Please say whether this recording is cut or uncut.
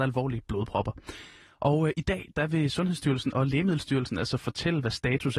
uncut